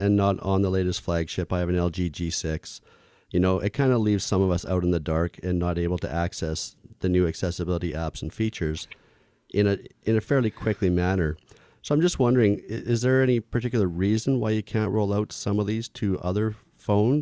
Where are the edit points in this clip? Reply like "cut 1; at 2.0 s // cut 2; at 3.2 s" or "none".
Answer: none